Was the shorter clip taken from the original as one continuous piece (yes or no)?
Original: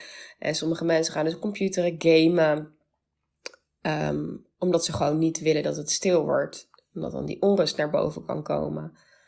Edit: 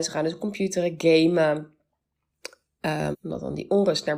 no